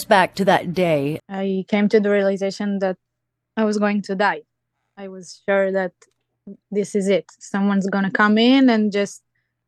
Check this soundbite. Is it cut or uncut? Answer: cut